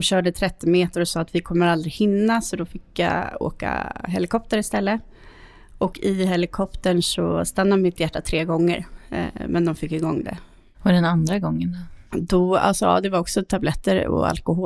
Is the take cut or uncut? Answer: uncut